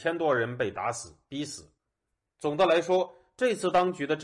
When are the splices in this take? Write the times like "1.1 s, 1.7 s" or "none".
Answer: none